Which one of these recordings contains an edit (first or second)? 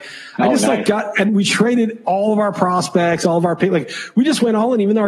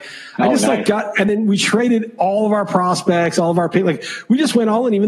first